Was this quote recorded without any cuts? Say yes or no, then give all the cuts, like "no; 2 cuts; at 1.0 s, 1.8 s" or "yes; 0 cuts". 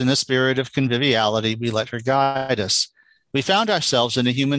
yes; 0 cuts